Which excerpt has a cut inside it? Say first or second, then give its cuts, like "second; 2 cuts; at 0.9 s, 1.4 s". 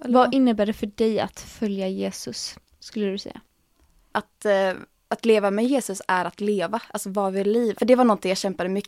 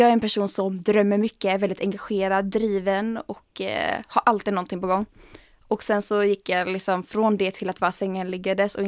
first; 2 cuts; at 4.1 s, 7.7 s